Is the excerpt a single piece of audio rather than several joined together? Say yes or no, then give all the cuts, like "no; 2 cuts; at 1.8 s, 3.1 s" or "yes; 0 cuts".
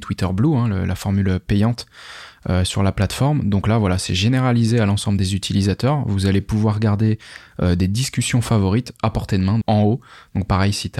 no; 1 cut; at 9.6 s